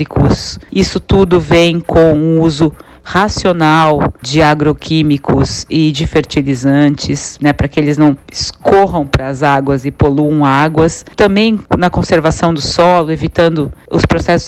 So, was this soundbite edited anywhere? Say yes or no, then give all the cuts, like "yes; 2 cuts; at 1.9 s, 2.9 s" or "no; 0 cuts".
no; 0 cuts